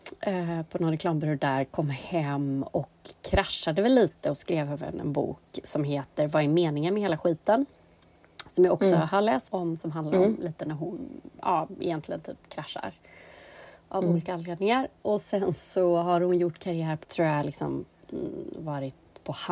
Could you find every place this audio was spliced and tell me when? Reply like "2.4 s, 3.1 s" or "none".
9.5 s, 17.0 s